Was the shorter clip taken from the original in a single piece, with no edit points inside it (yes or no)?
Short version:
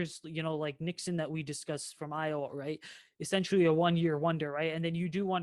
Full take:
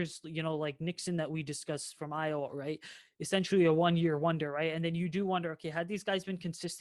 yes